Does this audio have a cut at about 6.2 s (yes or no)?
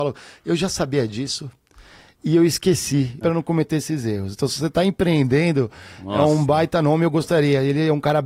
no